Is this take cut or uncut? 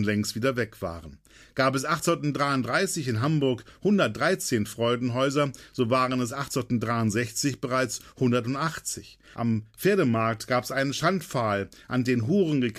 cut